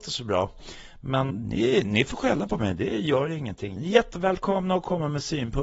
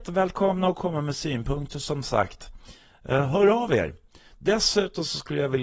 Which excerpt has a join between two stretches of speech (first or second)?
first